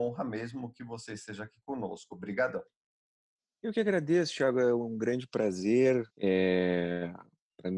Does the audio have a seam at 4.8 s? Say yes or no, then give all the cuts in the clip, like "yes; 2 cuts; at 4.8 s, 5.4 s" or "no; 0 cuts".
no; 1 cut; at 6.1 s